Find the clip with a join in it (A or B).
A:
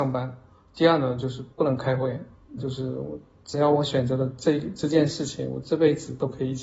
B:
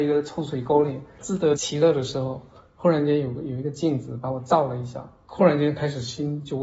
A